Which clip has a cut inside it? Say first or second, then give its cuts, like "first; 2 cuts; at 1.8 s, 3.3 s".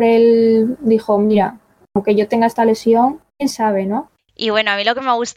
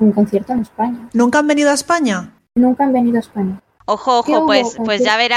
first; 1 cut; at 3.3 s